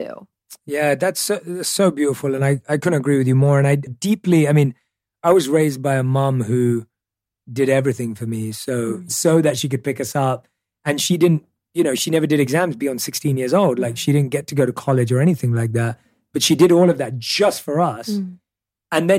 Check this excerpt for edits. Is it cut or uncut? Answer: cut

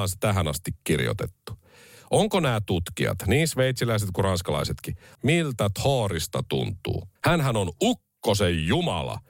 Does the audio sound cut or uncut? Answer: cut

